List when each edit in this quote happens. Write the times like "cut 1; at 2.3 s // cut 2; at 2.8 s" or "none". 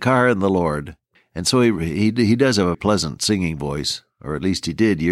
cut 1; at 1.1 s // cut 2; at 2.7 s

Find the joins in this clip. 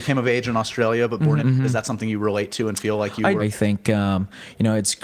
cut 1; at 1.4 s // cut 2; at 3.4 s

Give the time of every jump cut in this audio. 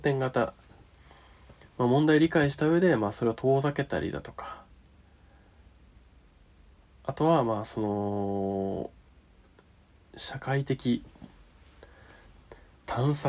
none

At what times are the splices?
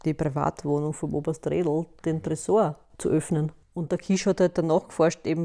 none

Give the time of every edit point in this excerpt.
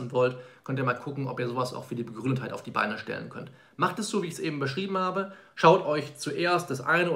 none

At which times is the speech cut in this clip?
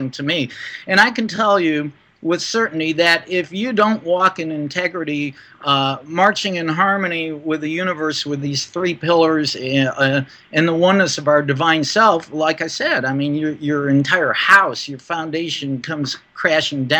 none

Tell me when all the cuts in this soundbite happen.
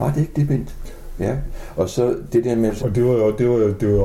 cut 1; at 1.2 s // cut 2; at 2.8 s

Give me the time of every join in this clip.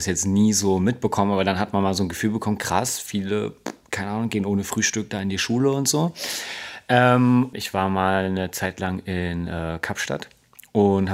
cut 1; at 7.5 s

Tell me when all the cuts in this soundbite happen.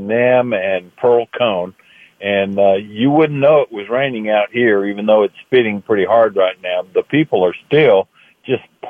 none

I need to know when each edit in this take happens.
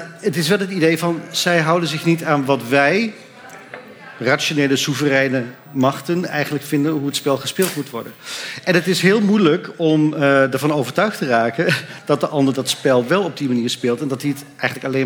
none

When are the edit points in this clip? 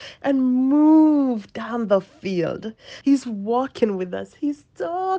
cut 1; at 3.0 s

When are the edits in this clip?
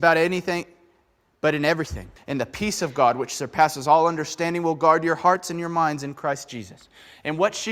cut 1; at 2.2 s

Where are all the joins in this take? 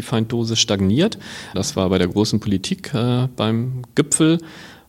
cut 1; at 1.5 s

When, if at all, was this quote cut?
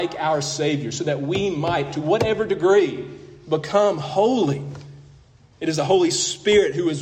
cut 1; at 1.9 s // cut 2; at 5.5 s

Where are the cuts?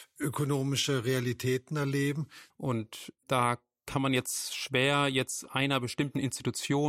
cut 1; at 2.5 s

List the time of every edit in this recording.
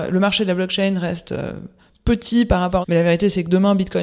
cut 1; at 2.8 s

